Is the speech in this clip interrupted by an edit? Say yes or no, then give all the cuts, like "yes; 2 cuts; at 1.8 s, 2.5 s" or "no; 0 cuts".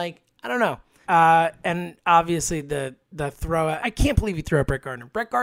yes; 2 cuts; at 1.0 s, 3.8 s